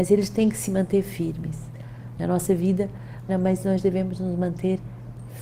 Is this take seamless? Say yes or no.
no